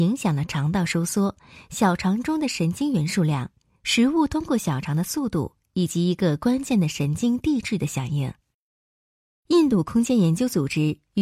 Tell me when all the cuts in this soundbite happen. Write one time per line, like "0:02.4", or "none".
0:09.3